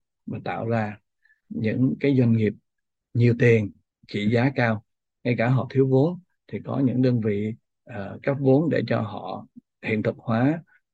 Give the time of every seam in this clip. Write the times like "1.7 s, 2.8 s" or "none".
none